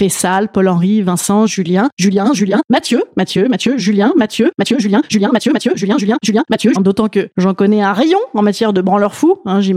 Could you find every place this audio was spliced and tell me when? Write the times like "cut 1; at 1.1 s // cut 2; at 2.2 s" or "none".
cut 1; at 1.5 s // cut 2; at 6.8 s